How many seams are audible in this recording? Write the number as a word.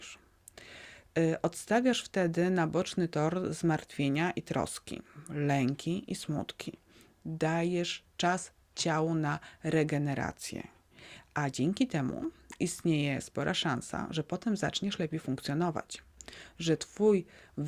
zero